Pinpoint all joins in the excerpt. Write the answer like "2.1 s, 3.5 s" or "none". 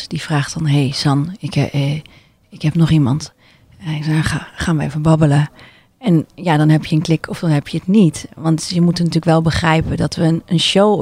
none